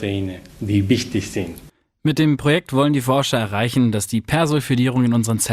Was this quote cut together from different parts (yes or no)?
no